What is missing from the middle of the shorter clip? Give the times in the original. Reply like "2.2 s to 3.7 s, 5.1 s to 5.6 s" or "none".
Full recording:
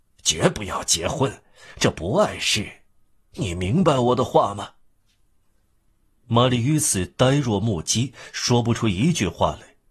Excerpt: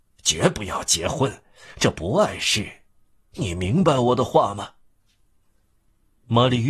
none